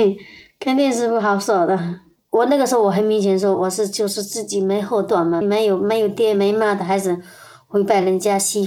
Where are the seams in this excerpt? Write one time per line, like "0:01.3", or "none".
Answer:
0:05.4